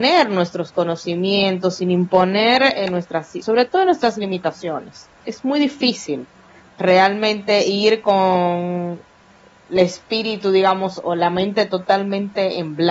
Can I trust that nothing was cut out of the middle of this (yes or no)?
no